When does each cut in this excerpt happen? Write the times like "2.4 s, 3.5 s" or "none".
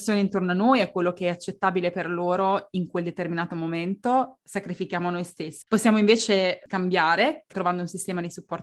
5.6 s